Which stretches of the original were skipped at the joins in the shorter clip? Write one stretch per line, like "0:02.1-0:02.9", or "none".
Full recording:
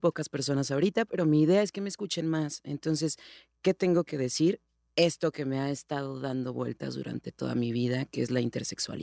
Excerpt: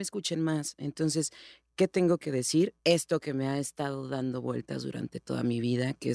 0:04.7-0:04.9